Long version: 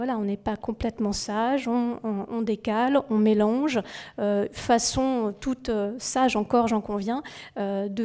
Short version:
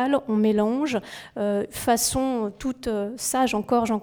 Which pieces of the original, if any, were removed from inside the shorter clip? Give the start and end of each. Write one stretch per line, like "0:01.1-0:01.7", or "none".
none